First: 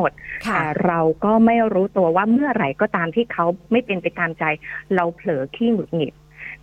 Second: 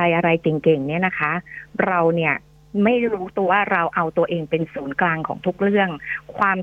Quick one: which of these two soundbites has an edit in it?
second; 1 cut; at 3.5 s

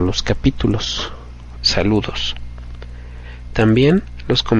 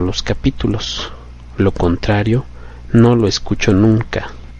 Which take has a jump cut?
first; 1 cut; at 1.6 s

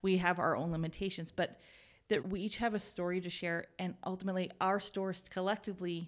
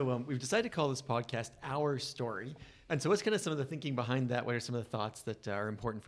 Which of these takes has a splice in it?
first; 1 cut; at 2.2 s

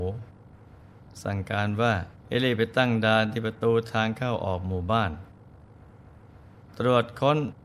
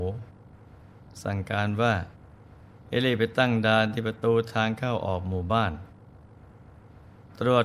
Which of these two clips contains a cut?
first; 1 cut; at 2.2 s

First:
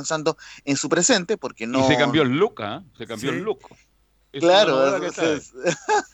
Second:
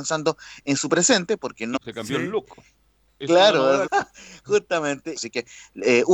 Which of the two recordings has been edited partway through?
second; 3 cuts; at 1.8 s, 3.9 s, 5.2 s

